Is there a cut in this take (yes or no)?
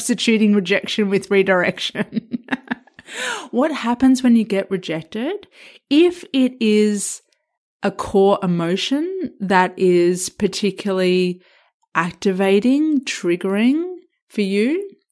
no